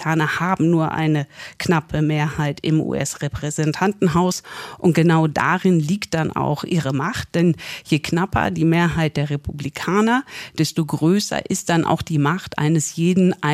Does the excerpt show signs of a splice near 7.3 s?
no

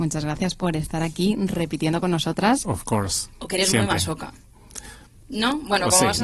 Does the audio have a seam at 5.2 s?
yes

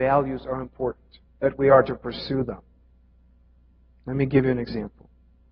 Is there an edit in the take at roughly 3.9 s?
no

